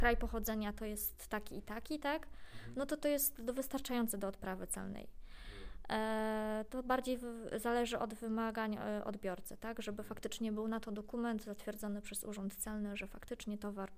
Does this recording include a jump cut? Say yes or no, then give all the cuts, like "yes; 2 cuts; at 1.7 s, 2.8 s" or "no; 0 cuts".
no; 0 cuts